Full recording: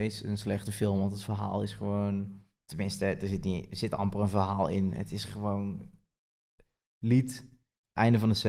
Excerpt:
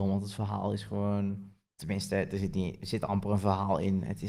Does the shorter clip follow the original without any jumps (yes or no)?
yes